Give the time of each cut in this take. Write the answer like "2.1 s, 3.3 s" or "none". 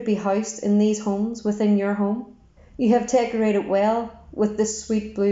2.6 s